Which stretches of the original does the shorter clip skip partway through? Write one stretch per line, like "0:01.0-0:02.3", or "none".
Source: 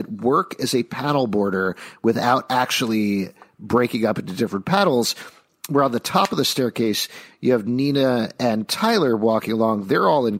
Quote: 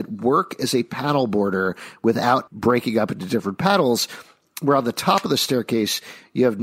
0:02.5-0:03.5